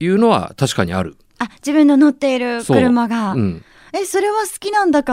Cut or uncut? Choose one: uncut